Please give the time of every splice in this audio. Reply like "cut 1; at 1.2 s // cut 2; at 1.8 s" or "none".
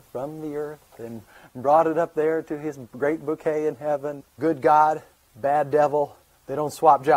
cut 1; at 4.2 s